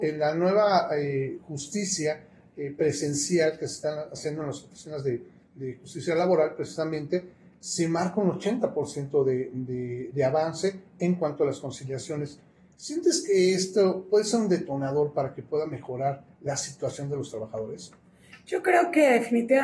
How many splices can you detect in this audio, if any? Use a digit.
0